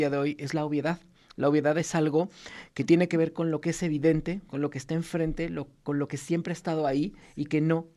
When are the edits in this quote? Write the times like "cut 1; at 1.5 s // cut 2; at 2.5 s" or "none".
none

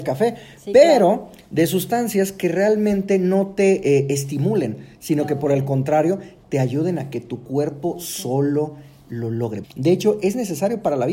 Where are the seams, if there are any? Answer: cut 1; at 9.6 s

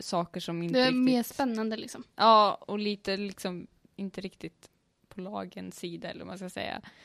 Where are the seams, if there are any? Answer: none

